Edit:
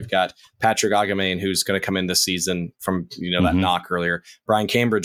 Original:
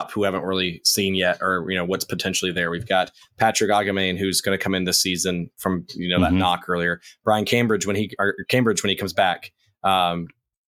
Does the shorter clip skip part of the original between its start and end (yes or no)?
no